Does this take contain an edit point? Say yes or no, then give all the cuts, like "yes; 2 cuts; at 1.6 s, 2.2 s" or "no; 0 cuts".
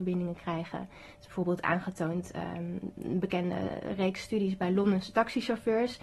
no; 0 cuts